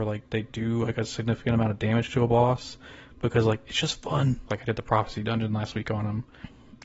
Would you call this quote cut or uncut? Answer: cut